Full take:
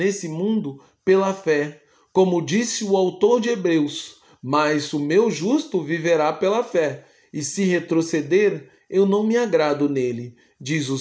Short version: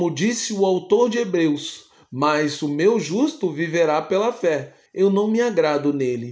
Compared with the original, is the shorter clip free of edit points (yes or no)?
no